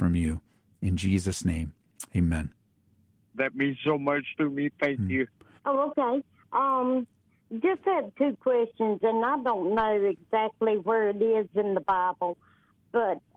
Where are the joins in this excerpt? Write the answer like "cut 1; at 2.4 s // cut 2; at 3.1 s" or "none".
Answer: cut 1; at 3.3 s // cut 2; at 5.6 s